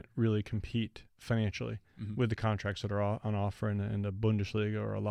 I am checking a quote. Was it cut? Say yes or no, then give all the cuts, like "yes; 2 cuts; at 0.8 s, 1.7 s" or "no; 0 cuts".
no; 0 cuts